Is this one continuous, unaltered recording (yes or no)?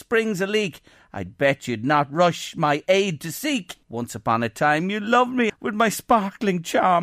no